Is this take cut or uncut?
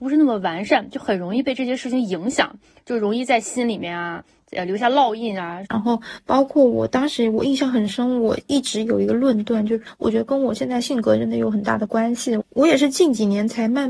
cut